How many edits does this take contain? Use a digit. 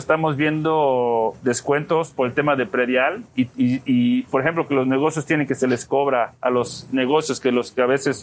1